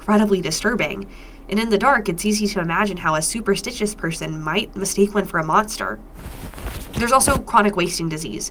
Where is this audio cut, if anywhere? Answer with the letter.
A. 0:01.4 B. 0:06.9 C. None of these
C